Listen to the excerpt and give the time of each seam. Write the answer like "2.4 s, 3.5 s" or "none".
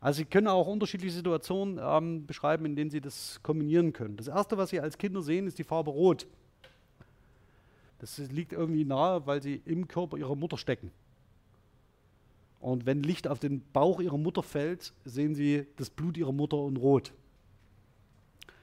7.9 s